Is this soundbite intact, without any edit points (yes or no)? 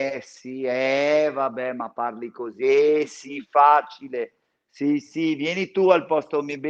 yes